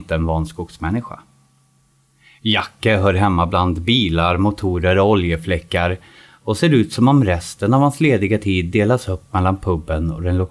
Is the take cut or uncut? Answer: uncut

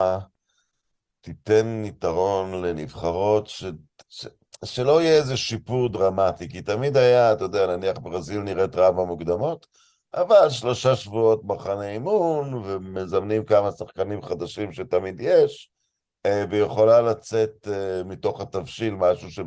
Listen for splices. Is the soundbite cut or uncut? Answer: uncut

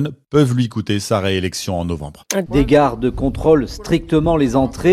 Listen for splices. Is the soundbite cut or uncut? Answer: cut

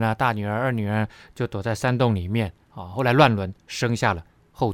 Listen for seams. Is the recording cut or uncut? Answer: uncut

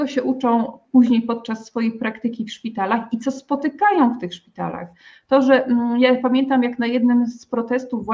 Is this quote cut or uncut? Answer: uncut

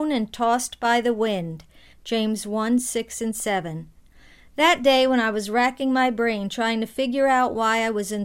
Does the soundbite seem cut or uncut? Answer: cut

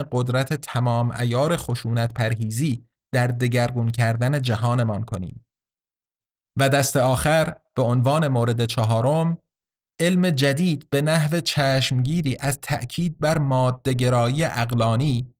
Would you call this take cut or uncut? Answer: uncut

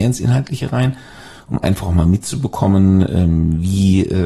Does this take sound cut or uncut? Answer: uncut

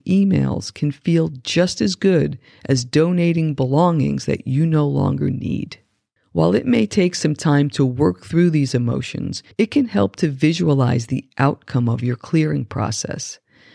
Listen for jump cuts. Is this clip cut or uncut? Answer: cut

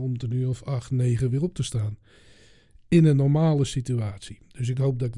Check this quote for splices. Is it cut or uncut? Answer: uncut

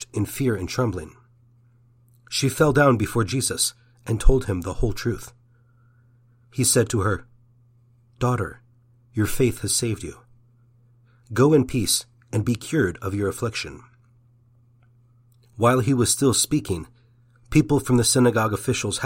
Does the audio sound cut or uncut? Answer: uncut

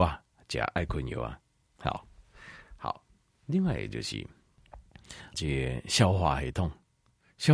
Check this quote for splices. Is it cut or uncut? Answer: cut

